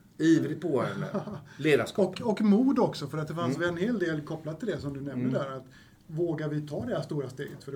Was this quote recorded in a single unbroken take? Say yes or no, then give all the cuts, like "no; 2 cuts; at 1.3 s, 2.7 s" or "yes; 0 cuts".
yes; 0 cuts